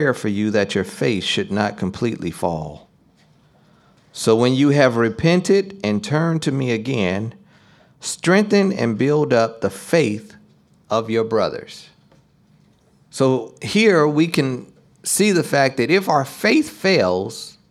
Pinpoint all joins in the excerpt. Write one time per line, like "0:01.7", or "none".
none